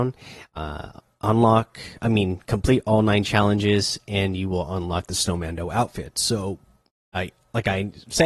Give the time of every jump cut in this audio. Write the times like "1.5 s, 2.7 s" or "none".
none